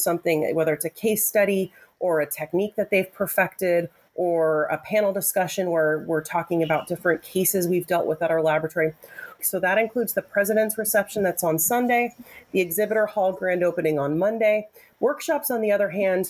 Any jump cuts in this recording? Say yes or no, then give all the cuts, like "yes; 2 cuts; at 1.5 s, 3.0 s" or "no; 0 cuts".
yes; 2 cuts; at 9.4 s, 14.9 s